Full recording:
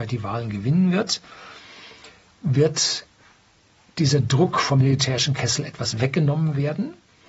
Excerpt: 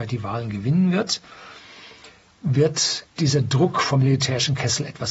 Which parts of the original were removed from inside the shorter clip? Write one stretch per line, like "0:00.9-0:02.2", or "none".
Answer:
0:03.1-0:03.9